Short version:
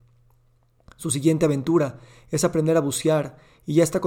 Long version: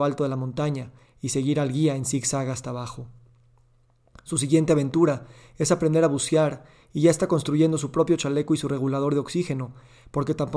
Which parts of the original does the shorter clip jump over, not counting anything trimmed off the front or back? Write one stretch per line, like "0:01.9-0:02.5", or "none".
none

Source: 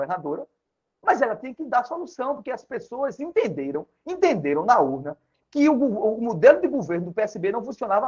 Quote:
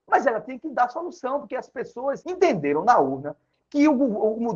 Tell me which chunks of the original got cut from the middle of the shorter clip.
0:03.2-0:04.0

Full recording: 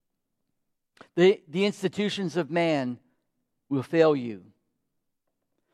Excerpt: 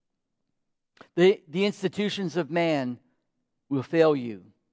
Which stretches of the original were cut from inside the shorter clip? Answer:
none

